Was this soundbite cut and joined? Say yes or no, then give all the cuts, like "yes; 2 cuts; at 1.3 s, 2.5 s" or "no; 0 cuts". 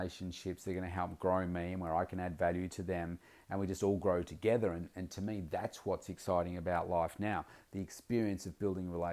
no; 0 cuts